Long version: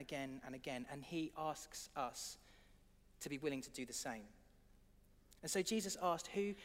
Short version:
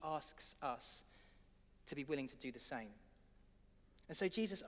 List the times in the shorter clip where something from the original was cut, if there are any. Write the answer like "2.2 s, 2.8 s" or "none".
none